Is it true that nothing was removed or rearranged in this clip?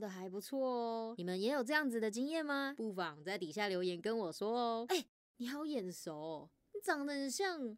no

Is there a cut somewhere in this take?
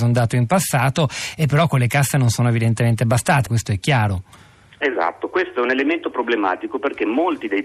yes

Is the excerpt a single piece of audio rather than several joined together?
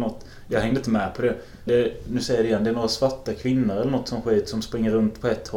no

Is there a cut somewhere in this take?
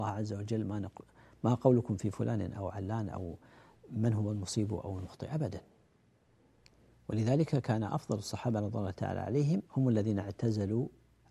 yes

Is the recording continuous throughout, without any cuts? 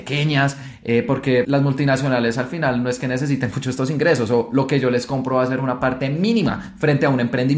no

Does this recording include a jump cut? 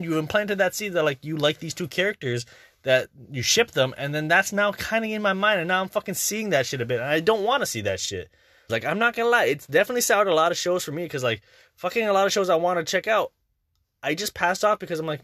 yes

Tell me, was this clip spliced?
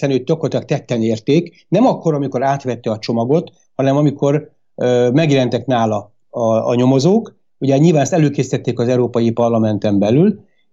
no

